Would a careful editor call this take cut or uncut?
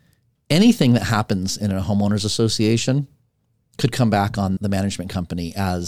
cut